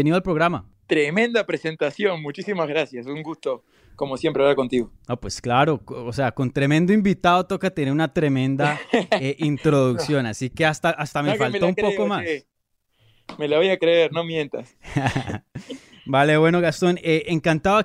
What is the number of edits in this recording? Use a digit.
0